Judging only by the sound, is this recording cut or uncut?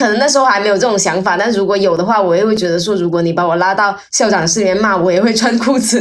uncut